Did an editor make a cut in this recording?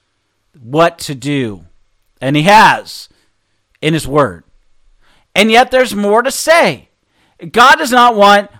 no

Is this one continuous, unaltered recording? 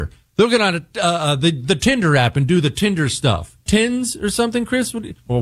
no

